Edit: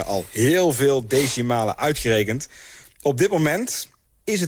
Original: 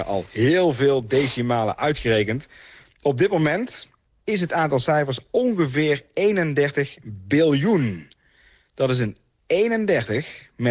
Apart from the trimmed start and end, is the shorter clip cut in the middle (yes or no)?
no